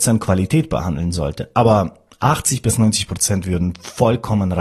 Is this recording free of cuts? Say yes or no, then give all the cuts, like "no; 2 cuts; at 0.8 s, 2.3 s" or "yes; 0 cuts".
yes; 0 cuts